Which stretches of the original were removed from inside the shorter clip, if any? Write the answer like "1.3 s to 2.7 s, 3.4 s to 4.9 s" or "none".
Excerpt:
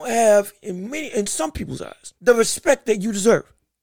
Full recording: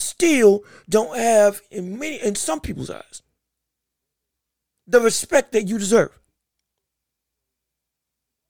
3.2 s to 4.8 s